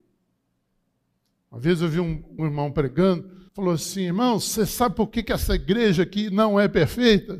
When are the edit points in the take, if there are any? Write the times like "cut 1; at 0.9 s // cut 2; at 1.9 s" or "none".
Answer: cut 1; at 2.4 s // cut 2; at 3.5 s